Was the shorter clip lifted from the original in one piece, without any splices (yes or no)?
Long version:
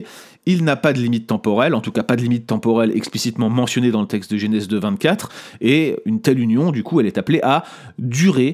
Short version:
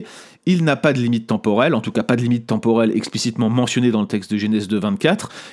yes